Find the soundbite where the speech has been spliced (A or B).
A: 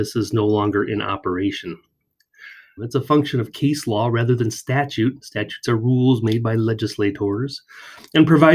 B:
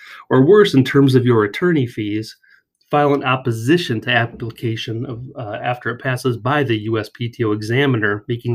A